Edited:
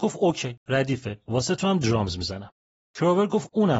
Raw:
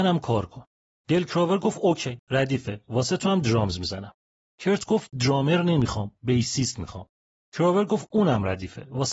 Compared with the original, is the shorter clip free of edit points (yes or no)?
no